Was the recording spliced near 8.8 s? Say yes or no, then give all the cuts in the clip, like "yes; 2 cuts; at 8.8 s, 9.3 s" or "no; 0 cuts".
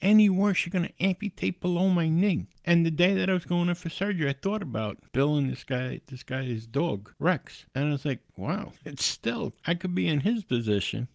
yes; 1 cut; at 8.8 s